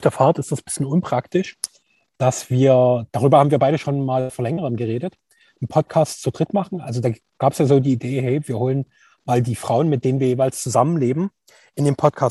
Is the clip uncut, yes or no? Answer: yes